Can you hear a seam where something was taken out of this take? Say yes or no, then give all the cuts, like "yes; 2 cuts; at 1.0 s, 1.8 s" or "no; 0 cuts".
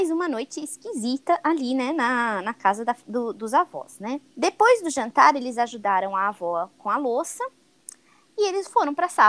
yes; 1 cut; at 4.3 s